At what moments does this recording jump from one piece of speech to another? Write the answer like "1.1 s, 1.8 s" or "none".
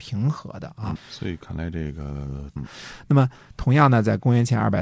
1.0 s, 2.6 s